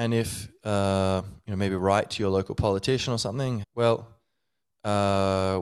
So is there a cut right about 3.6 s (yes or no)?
yes